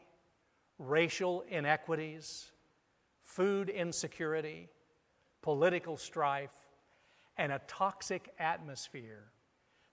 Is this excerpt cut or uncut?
uncut